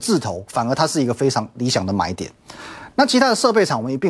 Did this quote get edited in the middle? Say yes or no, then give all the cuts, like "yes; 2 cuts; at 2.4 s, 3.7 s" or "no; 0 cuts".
no; 0 cuts